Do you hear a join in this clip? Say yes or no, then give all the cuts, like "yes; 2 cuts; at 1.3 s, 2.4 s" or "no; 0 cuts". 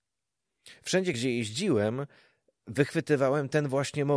no; 0 cuts